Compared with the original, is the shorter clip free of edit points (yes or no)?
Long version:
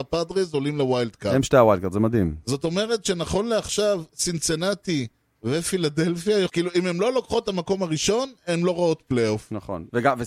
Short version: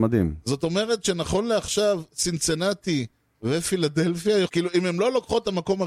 yes